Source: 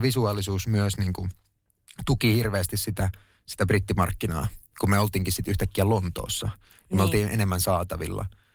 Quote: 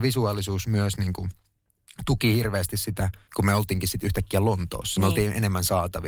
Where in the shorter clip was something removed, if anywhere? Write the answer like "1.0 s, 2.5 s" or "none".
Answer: 3.3 s, 5.0 s